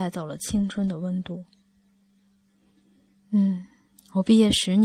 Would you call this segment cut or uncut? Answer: uncut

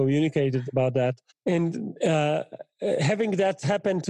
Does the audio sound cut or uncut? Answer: cut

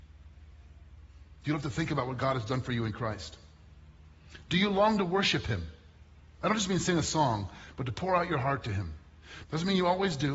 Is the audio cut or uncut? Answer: cut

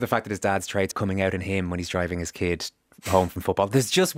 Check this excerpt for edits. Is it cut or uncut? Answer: cut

